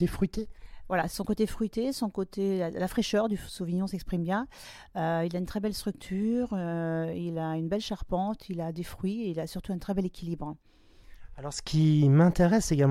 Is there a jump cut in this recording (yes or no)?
no